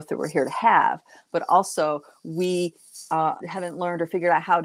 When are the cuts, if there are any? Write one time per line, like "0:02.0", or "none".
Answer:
0:03.4